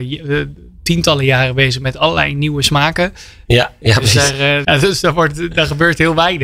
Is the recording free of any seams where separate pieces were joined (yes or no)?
no